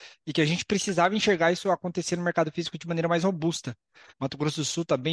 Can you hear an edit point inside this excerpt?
yes; 1 cut; at 4.1 s

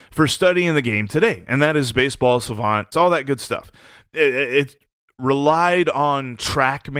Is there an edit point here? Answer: yes; 1 cut; at 2.9 s

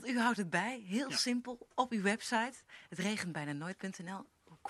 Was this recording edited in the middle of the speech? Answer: no; 0 cuts

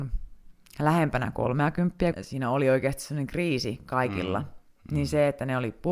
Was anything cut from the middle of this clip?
yes; 2 cuts; at 2.1 s, 4.8 s

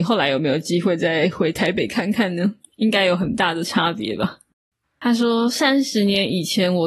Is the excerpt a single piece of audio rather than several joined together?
no; 1 cut; at 4.8 s

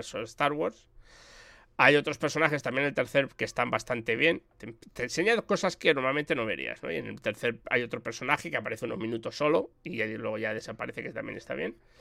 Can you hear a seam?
no; 0 cuts

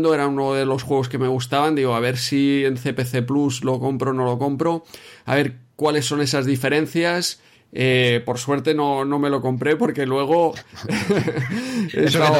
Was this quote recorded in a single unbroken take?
yes; 0 cuts

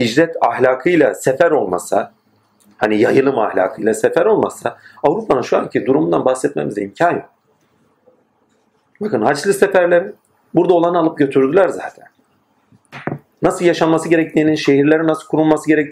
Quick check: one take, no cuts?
yes; 0 cuts

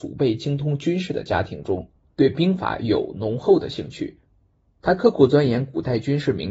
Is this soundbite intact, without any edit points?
no; 1 cut; at 2.1 s

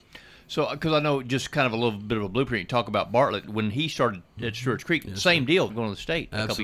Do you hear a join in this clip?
yes; 2 cuts; at 3.4 s, 5.7 s

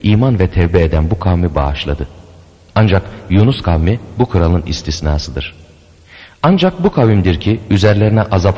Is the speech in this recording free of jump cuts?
no; 1 cut; at 2.7 s

